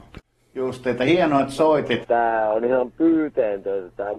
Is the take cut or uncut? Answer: cut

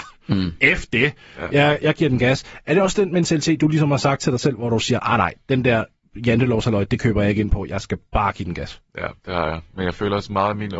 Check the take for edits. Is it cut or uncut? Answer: uncut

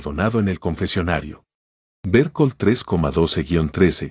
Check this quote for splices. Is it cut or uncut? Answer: cut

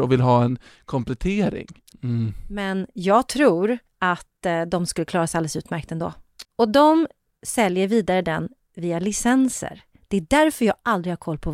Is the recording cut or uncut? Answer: cut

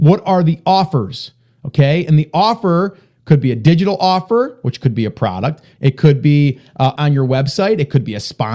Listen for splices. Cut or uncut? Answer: cut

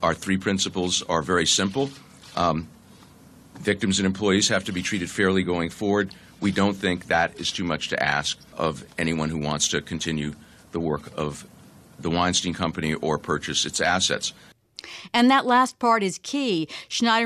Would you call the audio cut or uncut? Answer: cut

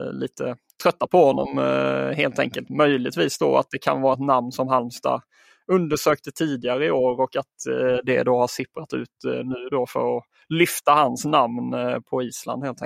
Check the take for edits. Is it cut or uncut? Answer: uncut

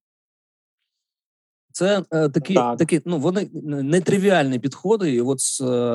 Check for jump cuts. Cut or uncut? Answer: uncut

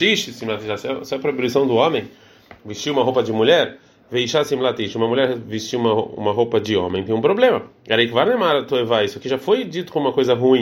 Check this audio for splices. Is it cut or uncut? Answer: uncut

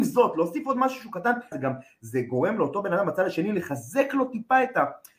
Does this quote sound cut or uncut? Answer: cut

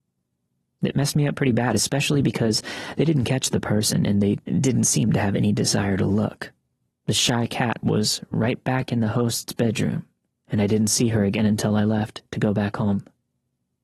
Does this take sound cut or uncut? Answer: cut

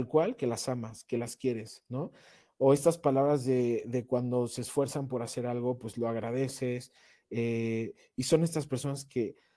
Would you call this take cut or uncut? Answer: uncut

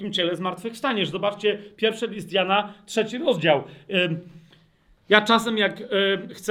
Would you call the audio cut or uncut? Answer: uncut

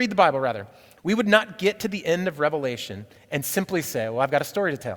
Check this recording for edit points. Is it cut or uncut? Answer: cut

